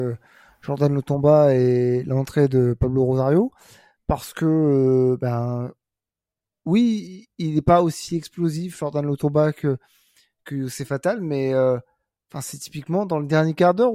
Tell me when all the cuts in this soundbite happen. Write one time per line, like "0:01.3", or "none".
none